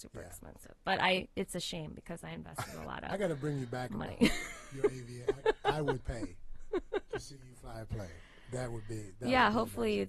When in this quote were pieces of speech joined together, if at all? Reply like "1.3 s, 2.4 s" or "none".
6.0 s